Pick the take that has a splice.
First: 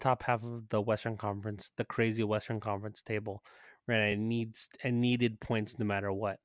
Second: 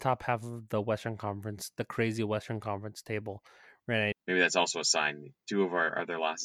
second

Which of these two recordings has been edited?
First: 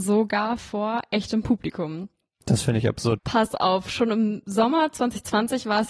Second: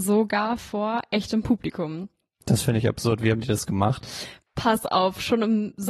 first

